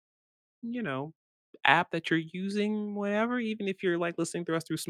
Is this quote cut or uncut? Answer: uncut